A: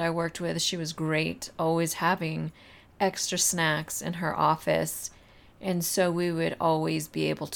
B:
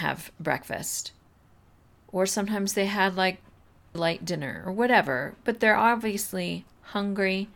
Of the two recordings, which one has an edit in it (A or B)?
B